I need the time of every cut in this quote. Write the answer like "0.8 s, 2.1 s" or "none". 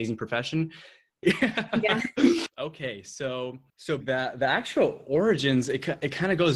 1.2 s, 2.5 s, 4.0 s